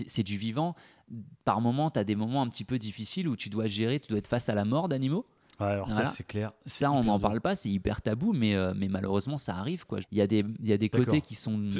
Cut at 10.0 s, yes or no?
yes